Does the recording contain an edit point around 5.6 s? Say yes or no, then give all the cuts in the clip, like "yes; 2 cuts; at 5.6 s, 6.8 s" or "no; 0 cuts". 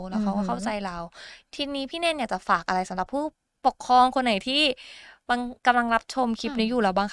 yes; 1 cut; at 5.6 s